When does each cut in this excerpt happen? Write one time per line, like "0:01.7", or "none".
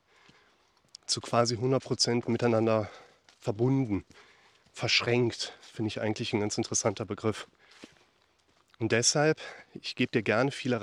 none